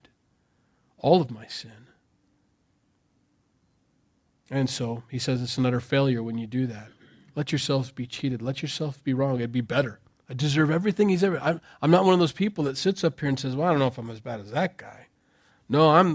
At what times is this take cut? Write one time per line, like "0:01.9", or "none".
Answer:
0:10.2